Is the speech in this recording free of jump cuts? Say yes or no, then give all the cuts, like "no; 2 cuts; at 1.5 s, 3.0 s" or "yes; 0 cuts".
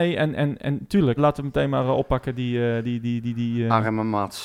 no; 1 cut; at 1.2 s